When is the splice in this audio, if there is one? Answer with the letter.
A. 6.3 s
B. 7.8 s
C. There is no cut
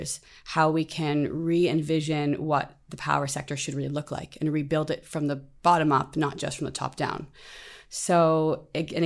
C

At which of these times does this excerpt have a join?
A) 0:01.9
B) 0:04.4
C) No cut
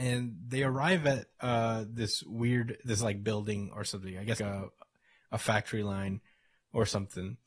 B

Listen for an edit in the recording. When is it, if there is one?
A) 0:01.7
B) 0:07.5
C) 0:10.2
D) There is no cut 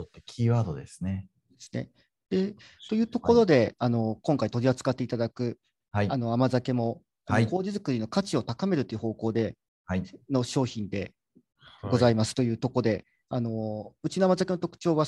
D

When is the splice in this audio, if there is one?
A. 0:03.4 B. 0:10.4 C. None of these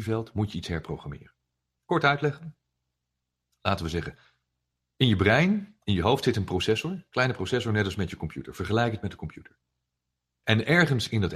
B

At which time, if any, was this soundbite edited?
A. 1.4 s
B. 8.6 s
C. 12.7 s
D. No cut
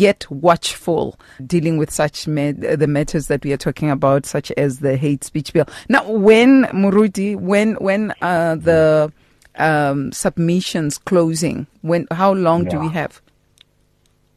A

